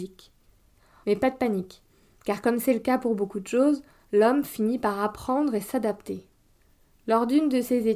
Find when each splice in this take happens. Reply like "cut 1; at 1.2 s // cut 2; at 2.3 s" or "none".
cut 1; at 1.0 s